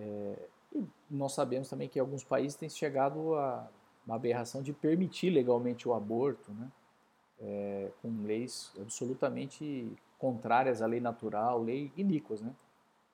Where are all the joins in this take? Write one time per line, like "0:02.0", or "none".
none

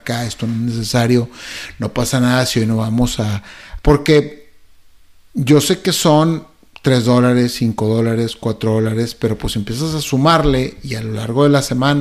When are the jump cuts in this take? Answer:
0:03.8

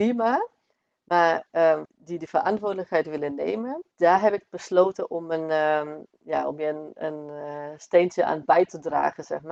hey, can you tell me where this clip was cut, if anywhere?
0:01.9
0:03.9

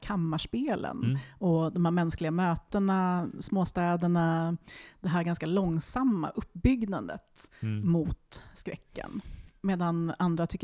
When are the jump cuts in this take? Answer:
none

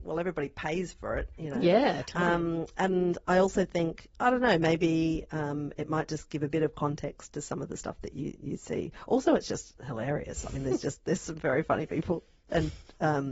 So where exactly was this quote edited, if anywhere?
none

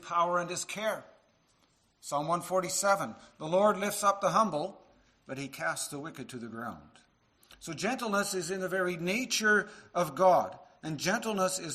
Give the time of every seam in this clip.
none

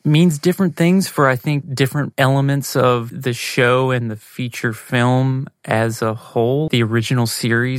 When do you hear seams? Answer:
0:06.7

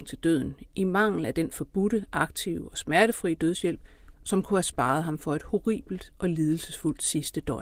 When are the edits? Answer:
0:04.1

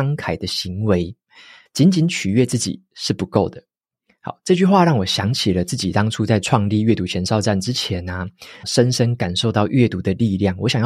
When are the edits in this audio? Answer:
0:01.7
0:08.6

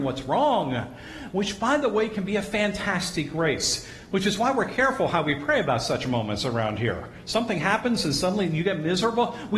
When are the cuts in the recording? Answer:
none

